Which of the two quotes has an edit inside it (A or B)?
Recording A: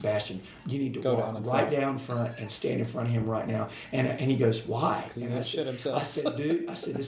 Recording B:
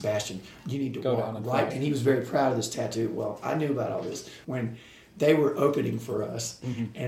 B